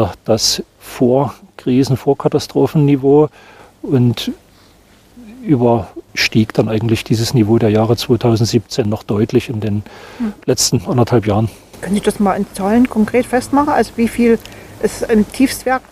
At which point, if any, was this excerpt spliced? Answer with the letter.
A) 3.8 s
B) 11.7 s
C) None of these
C